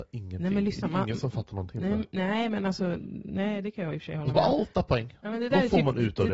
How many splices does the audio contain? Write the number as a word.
one